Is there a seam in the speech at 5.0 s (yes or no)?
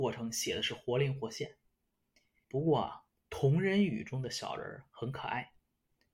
no